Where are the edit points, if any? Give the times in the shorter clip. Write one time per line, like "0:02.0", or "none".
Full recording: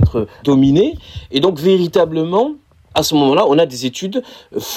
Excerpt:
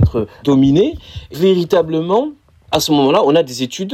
0:01.3